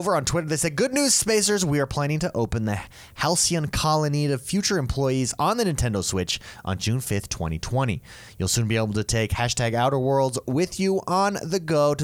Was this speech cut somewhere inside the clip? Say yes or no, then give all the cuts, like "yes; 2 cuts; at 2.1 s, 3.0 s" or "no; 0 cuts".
no; 0 cuts